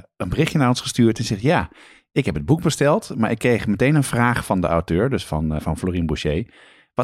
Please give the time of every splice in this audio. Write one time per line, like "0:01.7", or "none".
0:05.6